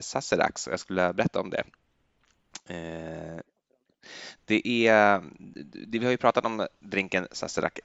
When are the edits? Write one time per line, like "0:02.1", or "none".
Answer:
none